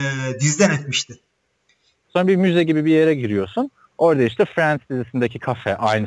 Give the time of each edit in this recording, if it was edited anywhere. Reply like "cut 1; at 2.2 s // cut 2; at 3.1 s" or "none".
cut 1; at 2.0 s